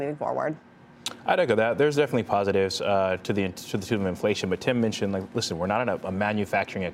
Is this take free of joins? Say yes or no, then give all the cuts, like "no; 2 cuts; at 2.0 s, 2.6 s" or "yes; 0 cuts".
yes; 0 cuts